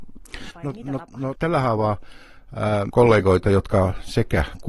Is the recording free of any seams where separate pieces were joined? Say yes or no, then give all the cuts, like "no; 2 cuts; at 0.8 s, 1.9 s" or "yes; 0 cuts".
no; 2 cuts; at 1.3 s, 2.9 s